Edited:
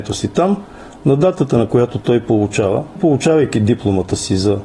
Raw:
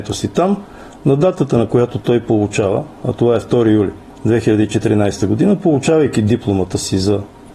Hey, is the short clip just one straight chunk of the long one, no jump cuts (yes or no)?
no